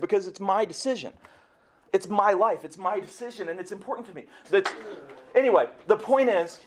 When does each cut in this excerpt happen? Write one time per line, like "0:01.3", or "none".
0:04.4